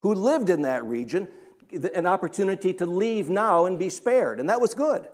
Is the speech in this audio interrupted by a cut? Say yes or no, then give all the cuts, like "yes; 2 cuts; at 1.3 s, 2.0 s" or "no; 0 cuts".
no; 0 cuts